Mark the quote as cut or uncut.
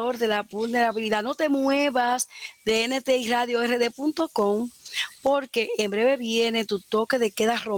uncut